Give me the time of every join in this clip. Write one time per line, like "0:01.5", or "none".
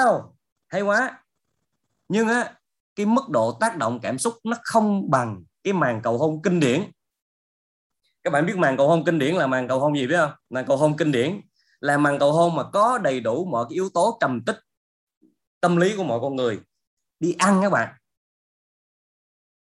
0:10.4